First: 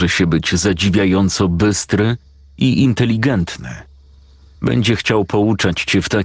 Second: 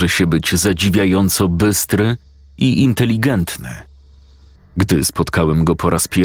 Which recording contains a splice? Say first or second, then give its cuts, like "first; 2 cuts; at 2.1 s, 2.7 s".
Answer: second; 1 cut; at 4.6 s